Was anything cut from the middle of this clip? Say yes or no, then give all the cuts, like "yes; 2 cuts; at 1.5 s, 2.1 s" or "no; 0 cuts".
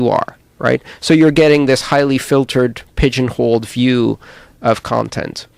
no; 0 cuts